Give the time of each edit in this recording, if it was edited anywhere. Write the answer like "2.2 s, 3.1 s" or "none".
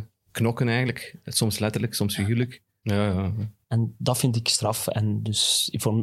2.8 s